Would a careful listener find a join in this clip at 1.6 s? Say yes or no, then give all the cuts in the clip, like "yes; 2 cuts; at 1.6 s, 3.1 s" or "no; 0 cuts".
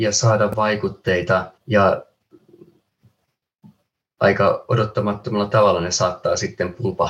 yes; 1 cut; at 1.6 s